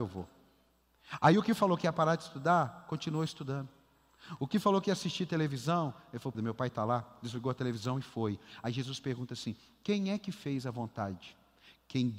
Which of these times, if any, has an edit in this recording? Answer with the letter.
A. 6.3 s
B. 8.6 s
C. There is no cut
A